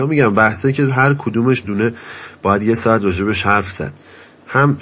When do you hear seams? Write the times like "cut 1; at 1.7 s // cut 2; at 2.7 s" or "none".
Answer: cut 1; at 1.6 s

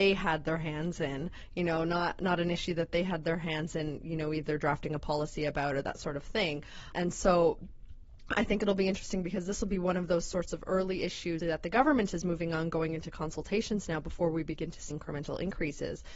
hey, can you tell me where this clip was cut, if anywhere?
cut 1; at 11.4 s // cut 2; at 14.9 s

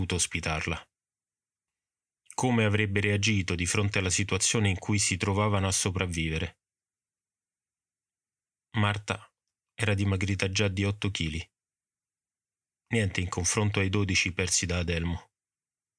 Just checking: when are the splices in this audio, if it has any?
none

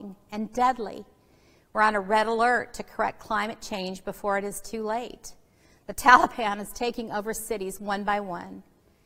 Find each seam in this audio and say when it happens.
none

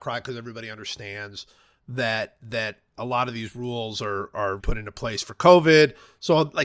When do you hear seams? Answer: cut 1; at 4.6 s

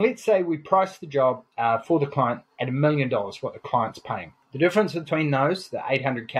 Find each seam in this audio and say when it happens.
none

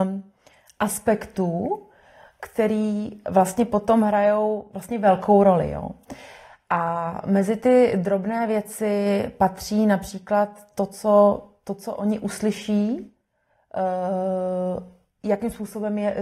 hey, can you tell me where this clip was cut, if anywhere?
none

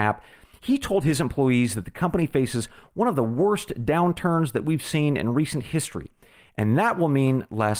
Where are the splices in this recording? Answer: none

